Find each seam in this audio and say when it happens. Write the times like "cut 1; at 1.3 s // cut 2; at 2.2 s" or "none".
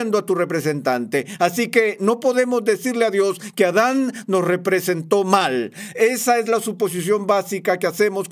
none